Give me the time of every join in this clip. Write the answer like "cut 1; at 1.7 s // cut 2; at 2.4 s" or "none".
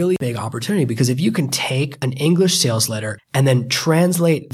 cut 1; at 3.2 s

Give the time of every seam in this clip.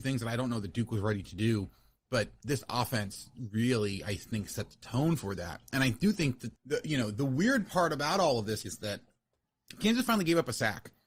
cut 1; at 6.5 s // cut 2; at 8.6 s

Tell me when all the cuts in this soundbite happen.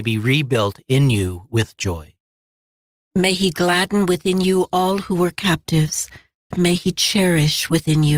cut 1; at 6.5 s

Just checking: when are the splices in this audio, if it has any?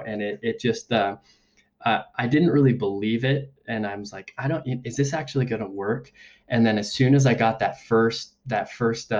none

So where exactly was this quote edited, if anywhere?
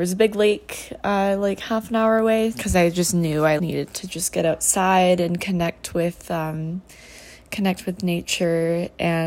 cut 1; at 2.5 s // cut 2; at 3.6 s

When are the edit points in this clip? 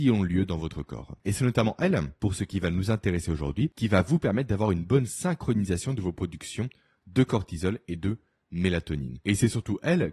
none

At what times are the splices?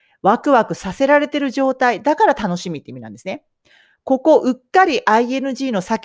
none

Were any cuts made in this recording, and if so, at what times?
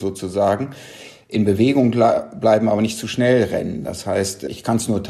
none

